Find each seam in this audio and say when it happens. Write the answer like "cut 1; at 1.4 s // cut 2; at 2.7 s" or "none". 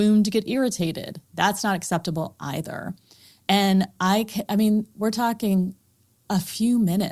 none